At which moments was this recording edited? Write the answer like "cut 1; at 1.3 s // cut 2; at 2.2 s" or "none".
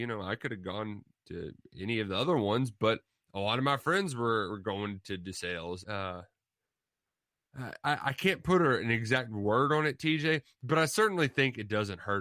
cut 1; at 5.8 s // cut 2; at 7.8 s